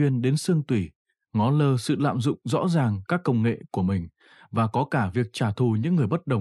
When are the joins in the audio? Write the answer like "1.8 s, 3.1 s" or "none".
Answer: none